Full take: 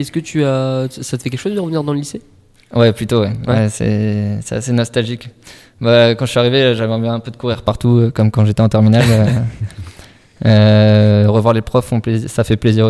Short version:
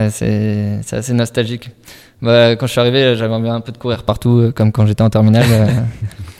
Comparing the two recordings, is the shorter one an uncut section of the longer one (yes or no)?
yes